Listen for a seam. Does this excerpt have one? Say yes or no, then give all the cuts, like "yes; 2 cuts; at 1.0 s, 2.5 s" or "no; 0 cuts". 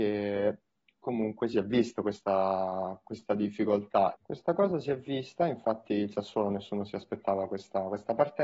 yes; 1 cut; at 4.1 s